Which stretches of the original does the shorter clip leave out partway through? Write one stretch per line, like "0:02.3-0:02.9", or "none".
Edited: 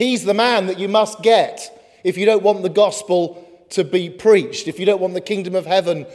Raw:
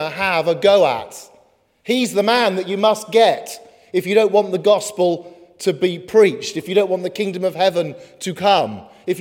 none